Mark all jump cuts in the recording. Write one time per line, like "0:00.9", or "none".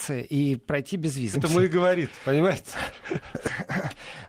0:01.3